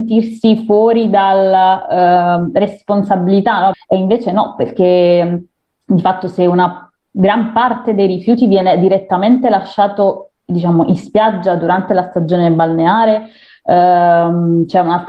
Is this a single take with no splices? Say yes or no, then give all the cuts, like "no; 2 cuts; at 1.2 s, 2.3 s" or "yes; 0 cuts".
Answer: no; 1 cut; at 3.7 s